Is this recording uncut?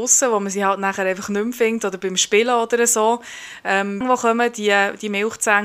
no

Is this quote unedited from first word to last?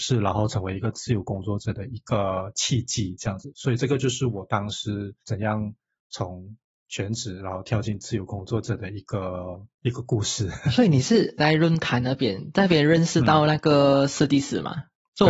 no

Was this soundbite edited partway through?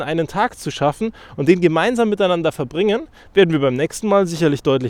no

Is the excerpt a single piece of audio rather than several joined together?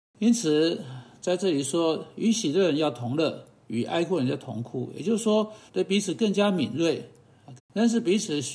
no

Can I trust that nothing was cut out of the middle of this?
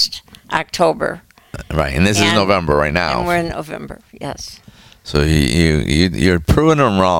yes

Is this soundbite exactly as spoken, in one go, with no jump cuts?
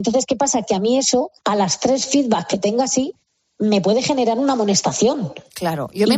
no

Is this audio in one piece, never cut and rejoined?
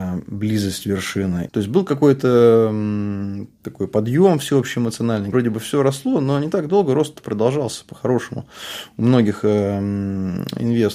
no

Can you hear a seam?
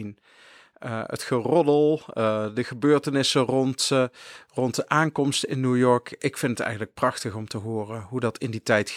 no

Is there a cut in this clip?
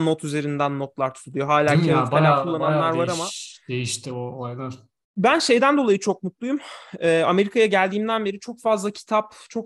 no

